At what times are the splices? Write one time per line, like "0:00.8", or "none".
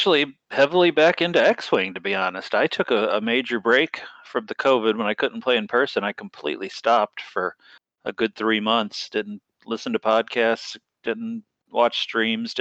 none